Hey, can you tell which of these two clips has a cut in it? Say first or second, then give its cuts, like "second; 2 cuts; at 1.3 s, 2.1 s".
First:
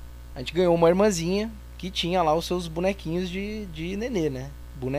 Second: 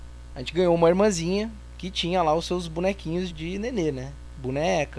second; 1 cut; at 3.3 s